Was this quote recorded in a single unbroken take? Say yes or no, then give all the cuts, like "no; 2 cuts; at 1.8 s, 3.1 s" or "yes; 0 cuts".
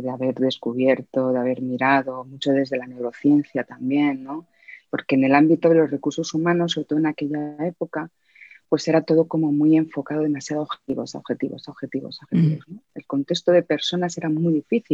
no; 1 cut; at 4.8 s